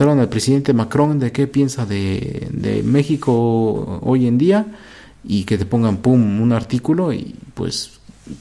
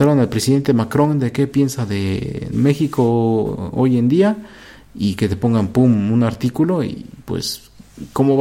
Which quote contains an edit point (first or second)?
second